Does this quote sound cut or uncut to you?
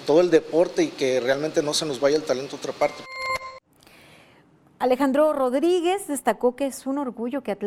uncut